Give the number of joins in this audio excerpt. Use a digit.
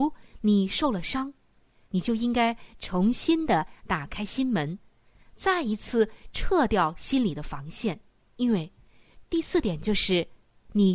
3